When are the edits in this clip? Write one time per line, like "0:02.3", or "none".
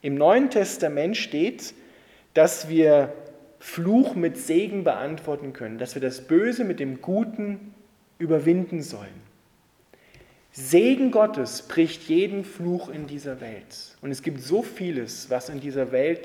none